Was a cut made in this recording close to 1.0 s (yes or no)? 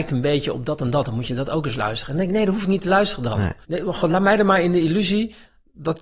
no